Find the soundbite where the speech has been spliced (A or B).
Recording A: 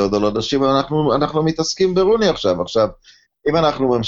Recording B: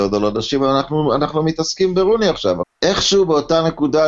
B